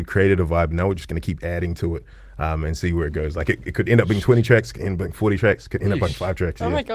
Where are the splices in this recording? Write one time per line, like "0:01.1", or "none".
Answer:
none